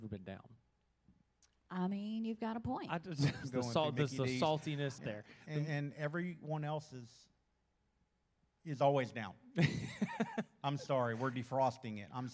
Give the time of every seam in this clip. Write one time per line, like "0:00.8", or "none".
0:03.4
0:05.0